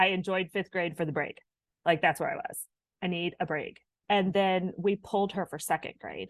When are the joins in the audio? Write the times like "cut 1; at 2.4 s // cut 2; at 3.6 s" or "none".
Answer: cut 1; at 4.0 s